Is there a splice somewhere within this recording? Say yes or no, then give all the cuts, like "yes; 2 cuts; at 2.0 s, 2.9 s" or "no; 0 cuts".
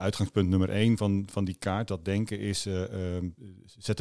no; 0 cuts